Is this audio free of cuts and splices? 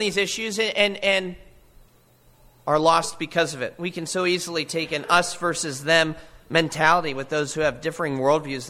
yes; 0 cuts

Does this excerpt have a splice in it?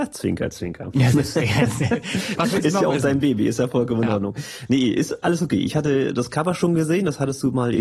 yes; 1 cut; at 2.4 s

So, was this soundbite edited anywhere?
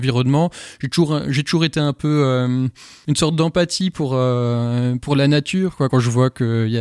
no; 0 cuts

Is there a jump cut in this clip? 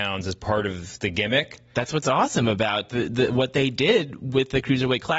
no; 0 cuts

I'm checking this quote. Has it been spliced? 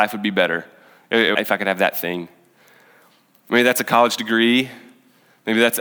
yes; 1 cut; at 1.3 s

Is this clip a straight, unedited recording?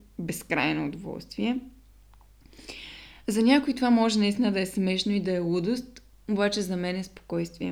yes; 0 cuts

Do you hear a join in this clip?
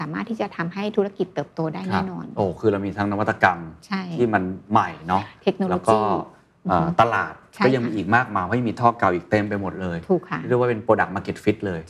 no; 0 cuts

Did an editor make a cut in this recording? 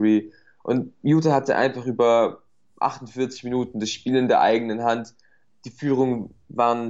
no; 0 cuts

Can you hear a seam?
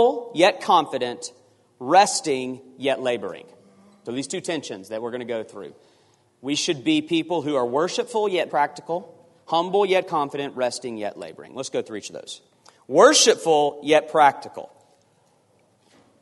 yes; 1 cut; at 8.5 s

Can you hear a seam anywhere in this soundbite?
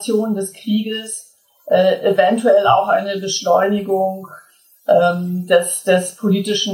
no; 0 cuts

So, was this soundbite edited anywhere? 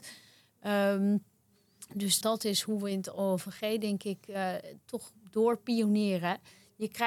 yes; 1 cut; at 2.2 s

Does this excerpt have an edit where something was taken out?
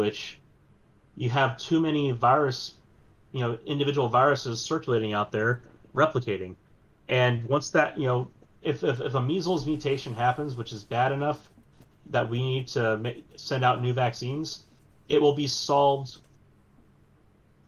no; 0 cuts

